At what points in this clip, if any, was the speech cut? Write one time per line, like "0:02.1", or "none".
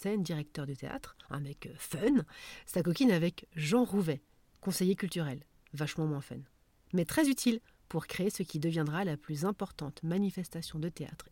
0:01.2